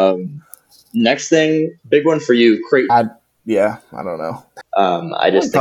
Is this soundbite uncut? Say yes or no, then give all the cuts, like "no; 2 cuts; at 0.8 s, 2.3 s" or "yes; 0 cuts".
no; 2 cuts; at 2.9 s, 4.6 s